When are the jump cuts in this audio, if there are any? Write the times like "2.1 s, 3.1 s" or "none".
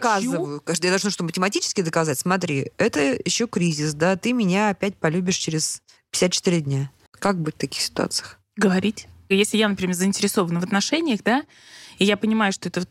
7.1 s